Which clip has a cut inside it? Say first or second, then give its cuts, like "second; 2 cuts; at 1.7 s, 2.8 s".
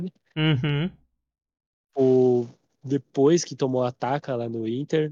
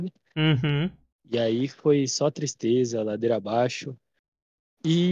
second; 1 cut; at 1.1 s